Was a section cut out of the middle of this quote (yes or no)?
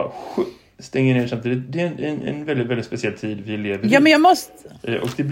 no